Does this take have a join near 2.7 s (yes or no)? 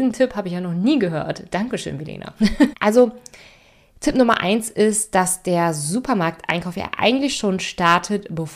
yes